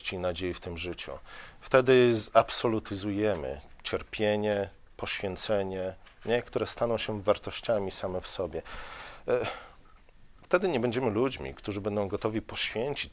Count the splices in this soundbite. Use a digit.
2